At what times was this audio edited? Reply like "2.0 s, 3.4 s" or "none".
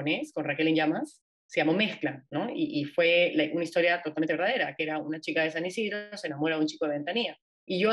none